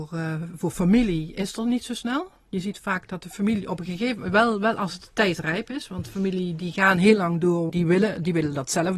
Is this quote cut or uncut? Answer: cut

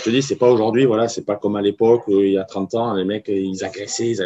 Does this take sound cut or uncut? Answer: uncut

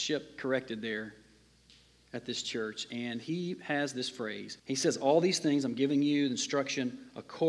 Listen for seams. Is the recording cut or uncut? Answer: cut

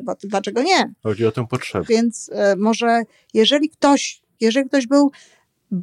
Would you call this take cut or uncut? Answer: cut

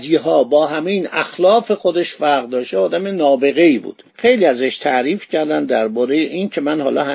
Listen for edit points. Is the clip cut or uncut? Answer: cut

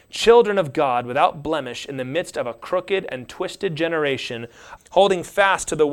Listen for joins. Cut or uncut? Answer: cut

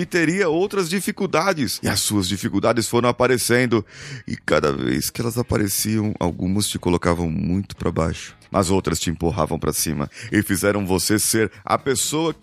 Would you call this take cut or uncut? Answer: uncut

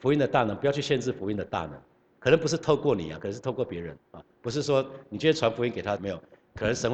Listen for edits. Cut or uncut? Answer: cut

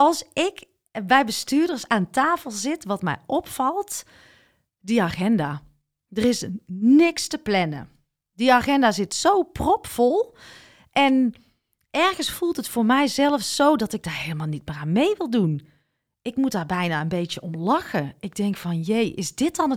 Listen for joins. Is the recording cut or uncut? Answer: uncut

